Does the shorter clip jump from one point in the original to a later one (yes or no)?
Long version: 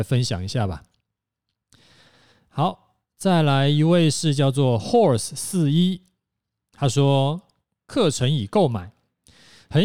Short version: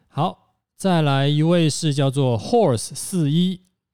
no